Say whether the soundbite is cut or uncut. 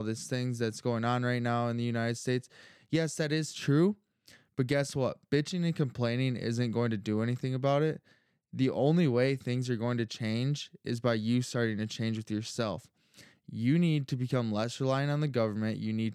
uncut